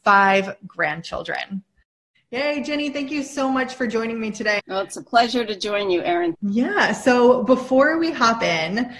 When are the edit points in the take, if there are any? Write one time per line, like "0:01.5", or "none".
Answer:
0:04.6
0:06.3

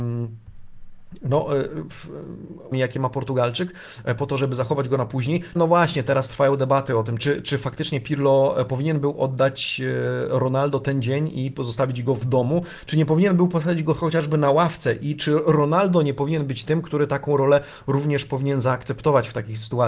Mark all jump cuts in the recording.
0:02.7
0:05.6
0:07.2

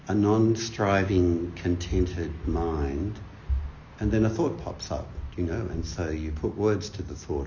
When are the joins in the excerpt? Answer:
none

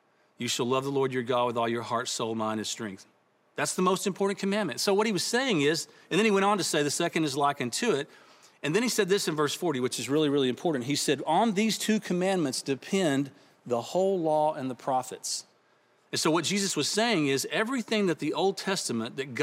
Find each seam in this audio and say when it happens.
none

